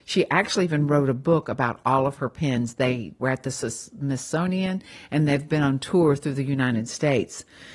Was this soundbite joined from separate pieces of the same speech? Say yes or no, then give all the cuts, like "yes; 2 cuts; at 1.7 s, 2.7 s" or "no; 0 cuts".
yes; 1 cut; at 3.2 s